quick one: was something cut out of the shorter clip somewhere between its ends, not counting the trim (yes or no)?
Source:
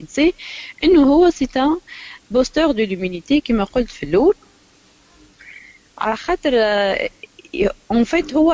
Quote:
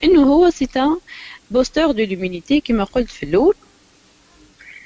no